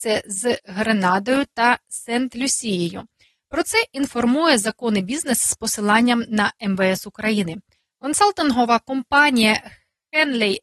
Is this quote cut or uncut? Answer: uncut